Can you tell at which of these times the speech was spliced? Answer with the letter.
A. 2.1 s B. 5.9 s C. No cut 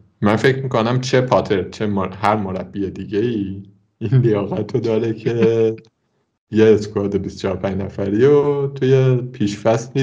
C